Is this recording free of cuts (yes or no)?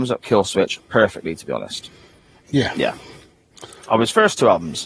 no